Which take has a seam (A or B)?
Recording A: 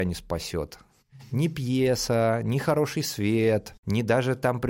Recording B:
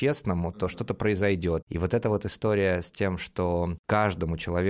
B